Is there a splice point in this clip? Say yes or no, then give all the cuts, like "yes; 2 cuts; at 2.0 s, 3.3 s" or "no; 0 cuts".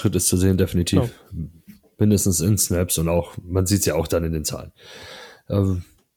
no; 0 cuts